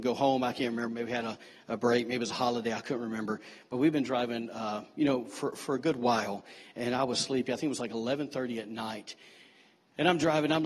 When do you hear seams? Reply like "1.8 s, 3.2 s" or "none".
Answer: none

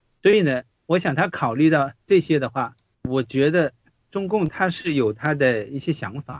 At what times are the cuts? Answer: 2.9 s

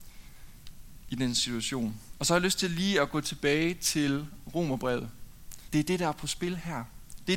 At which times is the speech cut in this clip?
2.1 s, 5.7 s

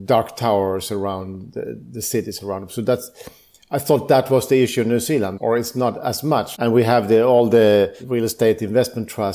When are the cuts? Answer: 5.4 s, 6.5 s

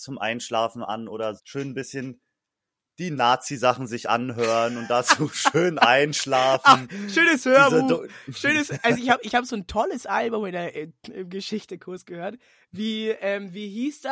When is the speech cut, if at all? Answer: 1.4 s

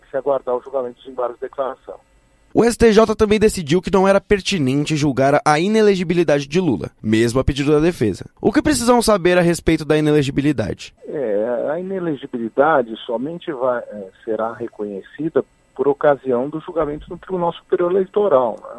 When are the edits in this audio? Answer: 11.0 s

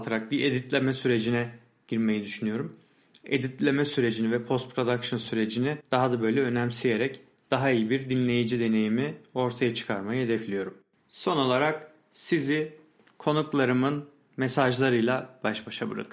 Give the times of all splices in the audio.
3.2 s

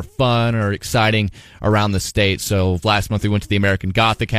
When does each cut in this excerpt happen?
2.8 s

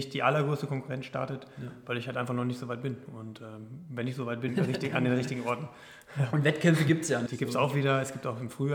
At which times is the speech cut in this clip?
4.5 s, 7.3 s

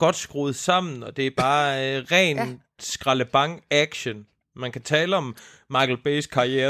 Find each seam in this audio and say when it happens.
none

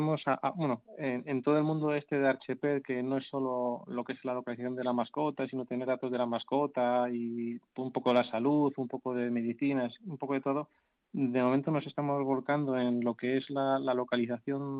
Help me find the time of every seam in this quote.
none

